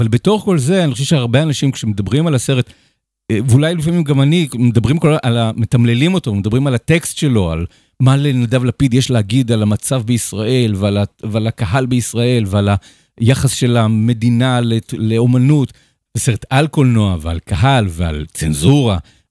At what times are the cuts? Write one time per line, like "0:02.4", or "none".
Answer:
0:16.1